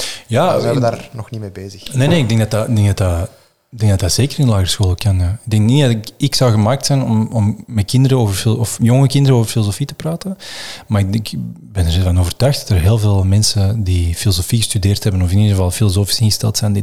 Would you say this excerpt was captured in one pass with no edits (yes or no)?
yes